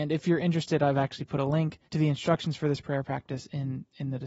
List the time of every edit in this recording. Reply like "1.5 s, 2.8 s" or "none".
1.9 s